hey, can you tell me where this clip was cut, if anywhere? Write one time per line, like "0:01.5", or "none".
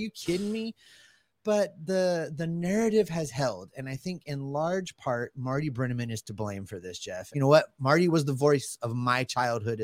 0:07.3